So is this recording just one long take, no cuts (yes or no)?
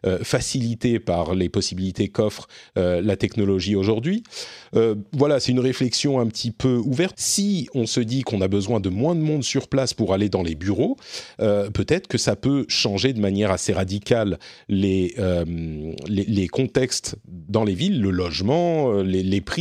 no